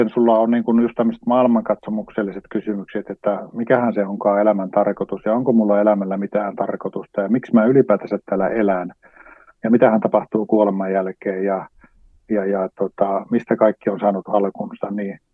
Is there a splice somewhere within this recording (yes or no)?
no